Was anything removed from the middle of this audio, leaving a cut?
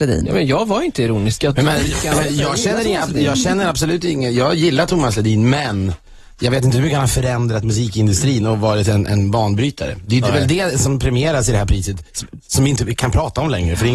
no; 0 cuts

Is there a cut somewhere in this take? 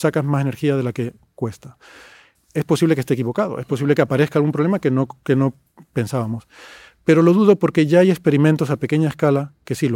yes; 1 cut; at 2.3 s

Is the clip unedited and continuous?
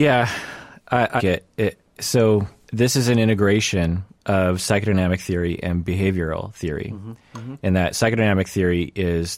no; 1 cut; at 1.2 s

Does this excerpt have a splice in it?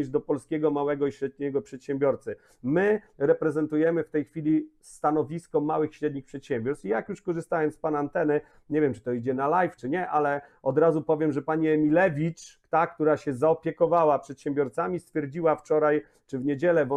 yes; 1 cut; at 9.8 s

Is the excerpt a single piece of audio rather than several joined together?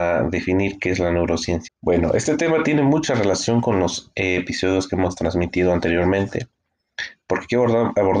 no; 1 cut; at 1.7 s

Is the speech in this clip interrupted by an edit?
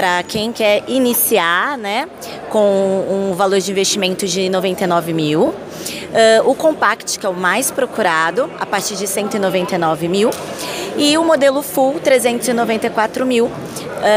no; 0 cuts

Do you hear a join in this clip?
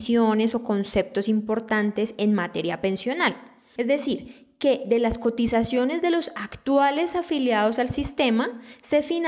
yes; 1 cut; at 3.8 s

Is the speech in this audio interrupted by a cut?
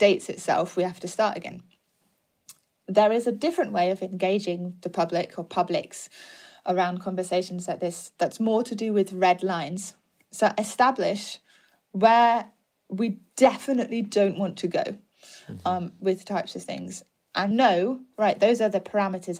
yes; 2 cuts; at 16.0 s, 17.5 s

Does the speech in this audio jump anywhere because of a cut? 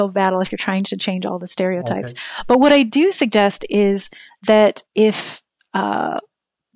yes; 1 cut; at 4.9 s

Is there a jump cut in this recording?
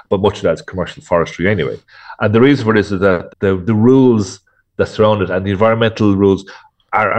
yes; 1 cut; at 3.3 s

